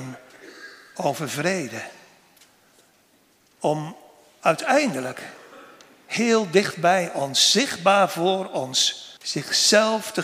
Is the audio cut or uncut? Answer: cut